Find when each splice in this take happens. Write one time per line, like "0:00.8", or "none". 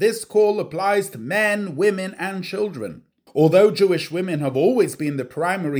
0:03.3